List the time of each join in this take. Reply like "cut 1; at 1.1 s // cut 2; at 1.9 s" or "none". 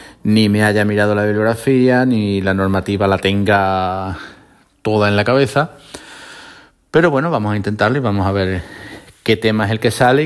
none